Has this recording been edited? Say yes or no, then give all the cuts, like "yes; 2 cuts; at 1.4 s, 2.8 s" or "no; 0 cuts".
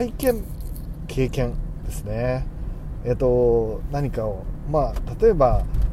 no; 0 cuts